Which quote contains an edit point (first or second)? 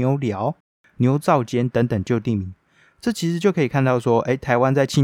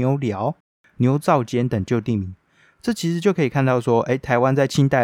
second